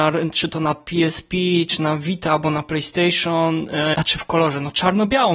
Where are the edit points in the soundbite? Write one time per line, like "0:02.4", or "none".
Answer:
0:03.9